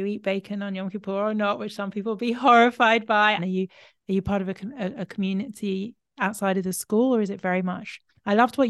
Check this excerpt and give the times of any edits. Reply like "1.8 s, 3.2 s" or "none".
3.4 s